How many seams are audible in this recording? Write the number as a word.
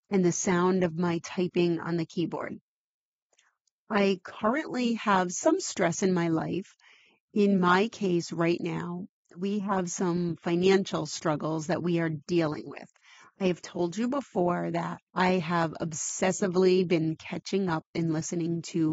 one